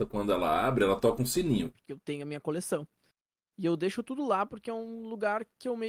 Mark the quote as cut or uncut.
cut